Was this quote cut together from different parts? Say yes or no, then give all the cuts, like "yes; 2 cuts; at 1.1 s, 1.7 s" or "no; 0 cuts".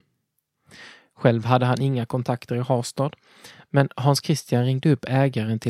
no; 0 cuts